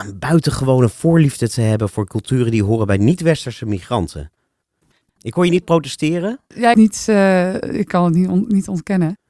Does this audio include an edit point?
yes; 1 cut; at 6.7 s

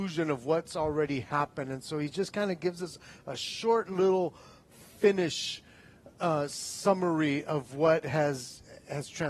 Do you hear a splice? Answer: no; 0 cuts

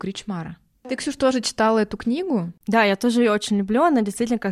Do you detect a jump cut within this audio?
no; 0 cuts

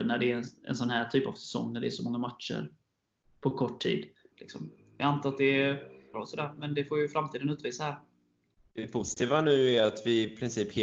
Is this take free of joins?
no; 3 cuts; at 4.3 s, 6.1 s, 8.6 s

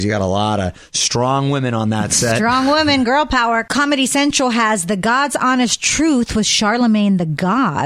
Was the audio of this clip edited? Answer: no; 0 cuts

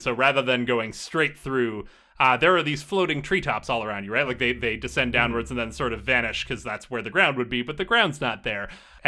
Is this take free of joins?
yes; 0 cuts

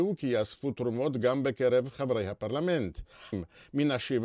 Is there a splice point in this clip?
yes; 1 cut; at 3.3 s

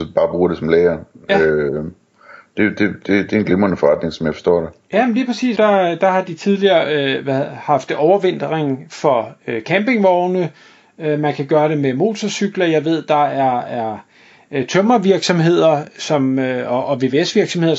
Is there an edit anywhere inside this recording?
yes; 1 cut; at 5.6 s

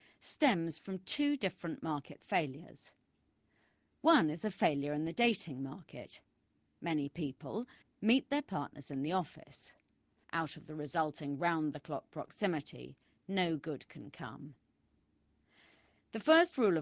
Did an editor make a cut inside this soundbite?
yes; 2 cuts; at 7.8 s, 10.2 s

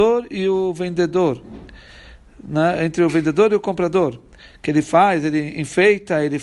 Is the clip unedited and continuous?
yes; 0 cuts

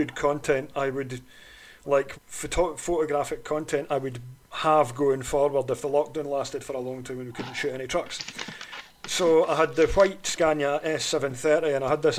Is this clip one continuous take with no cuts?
no; 1 cut; at 2.1 s

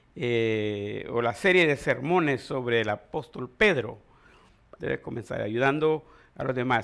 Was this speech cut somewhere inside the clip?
yes; 1 cut; at 4.8 s

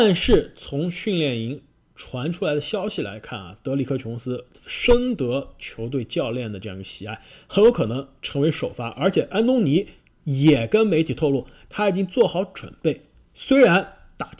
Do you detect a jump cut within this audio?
no; 0 cuts

